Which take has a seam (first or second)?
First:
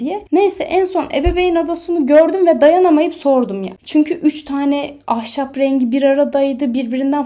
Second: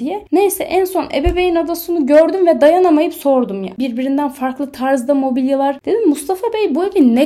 second